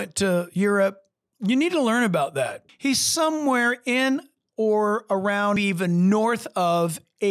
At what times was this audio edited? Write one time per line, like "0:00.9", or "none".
0:02.7
0:05.6